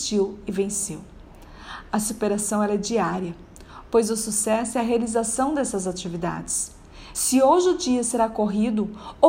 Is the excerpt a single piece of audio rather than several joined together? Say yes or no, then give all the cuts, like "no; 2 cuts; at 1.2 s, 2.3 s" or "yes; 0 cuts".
yes; 0 cuts